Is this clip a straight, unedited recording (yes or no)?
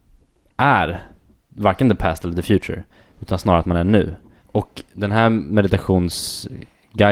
no